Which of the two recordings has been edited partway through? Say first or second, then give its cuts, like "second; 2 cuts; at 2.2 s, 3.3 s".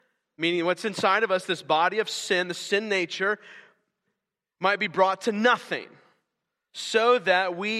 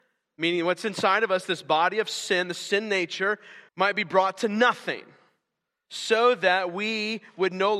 second; 1 cut; at 3.7 s